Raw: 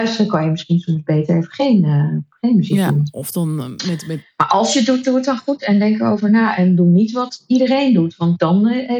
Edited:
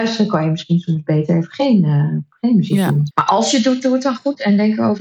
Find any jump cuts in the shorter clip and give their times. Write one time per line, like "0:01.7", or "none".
0:03.1